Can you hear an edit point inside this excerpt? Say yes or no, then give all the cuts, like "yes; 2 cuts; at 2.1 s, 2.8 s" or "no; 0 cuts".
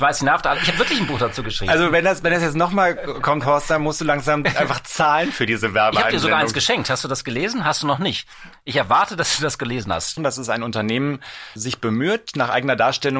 yes; 2 cuts; at 10.2 s, 11.6 s